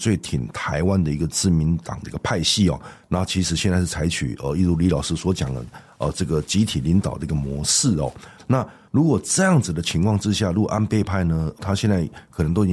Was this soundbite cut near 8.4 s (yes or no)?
yes